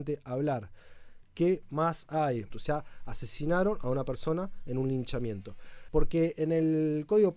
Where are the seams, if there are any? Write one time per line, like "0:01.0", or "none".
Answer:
0:02.5
0:05.9